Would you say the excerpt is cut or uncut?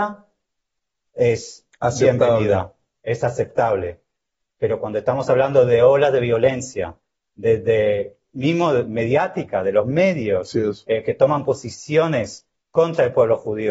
uncut